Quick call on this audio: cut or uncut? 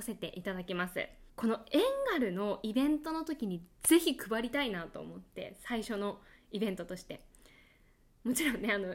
cut